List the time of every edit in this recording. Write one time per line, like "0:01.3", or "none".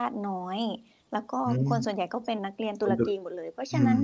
0:02.4